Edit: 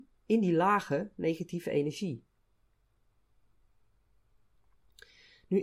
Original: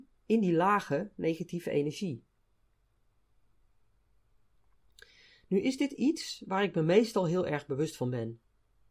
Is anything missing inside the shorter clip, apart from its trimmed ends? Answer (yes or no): no